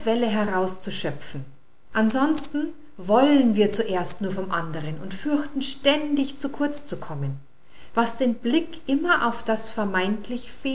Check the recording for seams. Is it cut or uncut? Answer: cut